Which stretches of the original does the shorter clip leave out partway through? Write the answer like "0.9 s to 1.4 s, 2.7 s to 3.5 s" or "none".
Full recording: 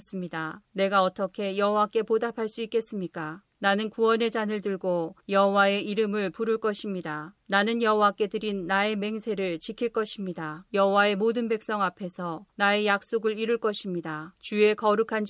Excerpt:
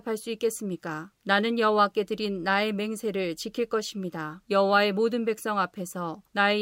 3.5 s to 7.4 s